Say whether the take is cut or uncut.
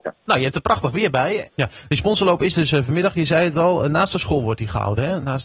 cut